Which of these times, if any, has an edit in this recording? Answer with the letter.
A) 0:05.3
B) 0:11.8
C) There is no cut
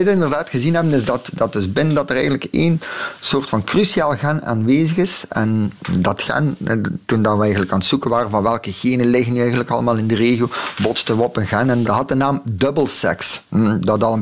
B